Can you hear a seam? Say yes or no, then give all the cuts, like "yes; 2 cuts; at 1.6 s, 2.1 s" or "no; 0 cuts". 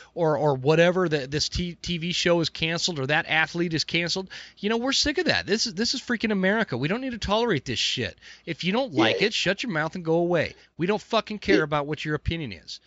no; 0 cuts